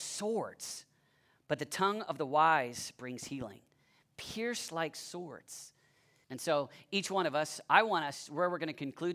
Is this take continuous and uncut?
no; 1 cut; at 6.2 s

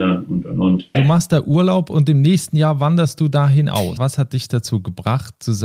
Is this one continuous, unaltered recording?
no; 2 cuts; at 0.9 s, 4.0 s

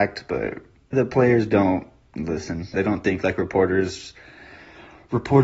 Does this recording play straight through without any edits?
no; 2 cuts; at 0.9 s, 2.7 s

